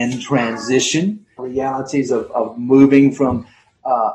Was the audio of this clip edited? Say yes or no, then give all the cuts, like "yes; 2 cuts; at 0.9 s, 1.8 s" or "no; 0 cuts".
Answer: yes; 1 cut; at 1.4 s